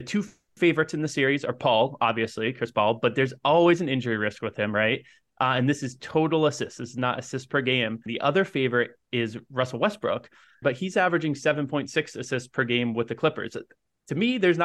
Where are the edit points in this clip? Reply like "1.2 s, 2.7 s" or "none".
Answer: 8.1 s, 10.6 s